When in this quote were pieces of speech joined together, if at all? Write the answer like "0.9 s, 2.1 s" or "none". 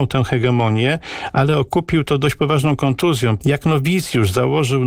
3.4 s